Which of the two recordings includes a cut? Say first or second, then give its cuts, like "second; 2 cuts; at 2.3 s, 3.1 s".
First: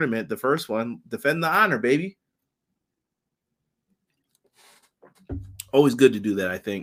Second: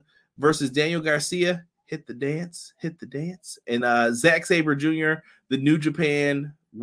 second; 1 cut; at 3.8 s